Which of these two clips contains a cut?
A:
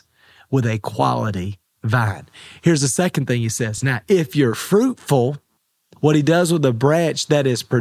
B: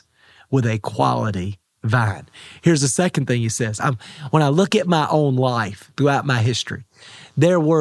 B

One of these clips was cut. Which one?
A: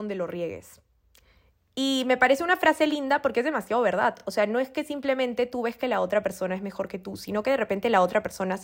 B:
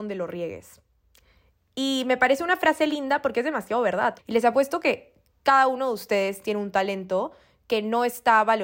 B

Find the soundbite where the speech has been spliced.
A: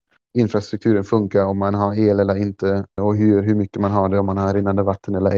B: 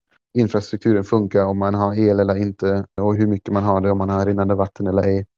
B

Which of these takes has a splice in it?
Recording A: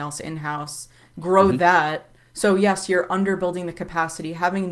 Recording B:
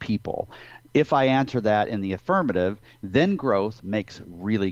A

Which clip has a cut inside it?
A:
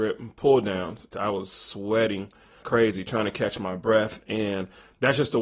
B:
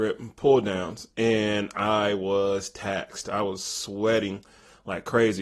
A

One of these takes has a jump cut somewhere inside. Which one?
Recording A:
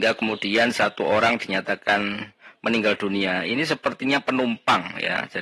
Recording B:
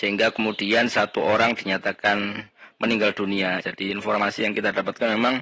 B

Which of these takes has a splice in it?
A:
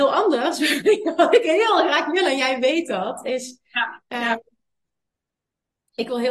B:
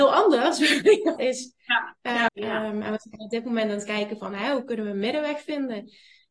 B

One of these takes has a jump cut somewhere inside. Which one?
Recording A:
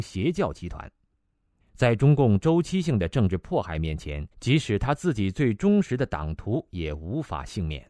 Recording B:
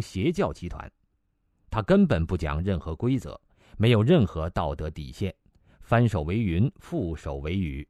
A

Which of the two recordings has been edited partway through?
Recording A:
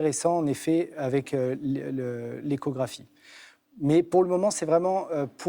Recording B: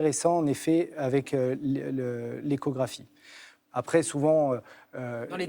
B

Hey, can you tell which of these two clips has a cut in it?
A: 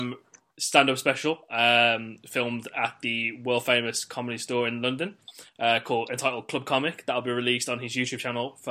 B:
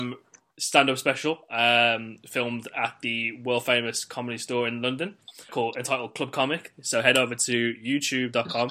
B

